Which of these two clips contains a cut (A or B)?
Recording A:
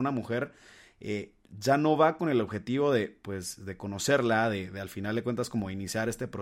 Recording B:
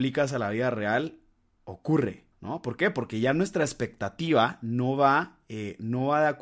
B